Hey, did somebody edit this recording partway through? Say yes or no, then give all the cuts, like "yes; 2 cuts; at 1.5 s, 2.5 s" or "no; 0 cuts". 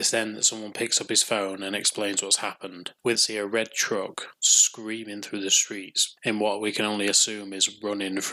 yes; 1 cut; at 3.2 s